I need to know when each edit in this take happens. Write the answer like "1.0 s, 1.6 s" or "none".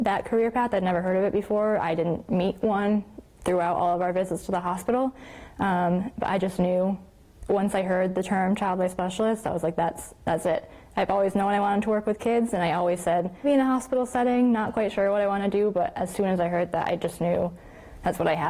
13.4 s